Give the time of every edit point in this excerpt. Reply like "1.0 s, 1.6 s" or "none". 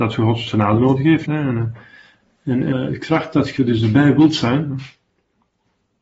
1.2 s, 2.7 s